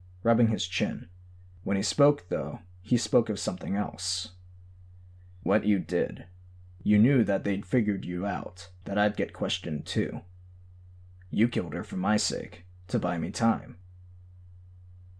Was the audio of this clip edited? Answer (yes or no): yes